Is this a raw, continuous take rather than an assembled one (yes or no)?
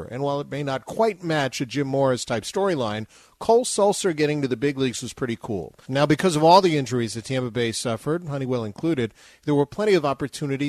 no